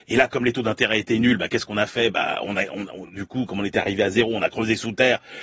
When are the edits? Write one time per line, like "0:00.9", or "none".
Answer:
none